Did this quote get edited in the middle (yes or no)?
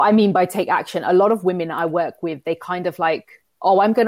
no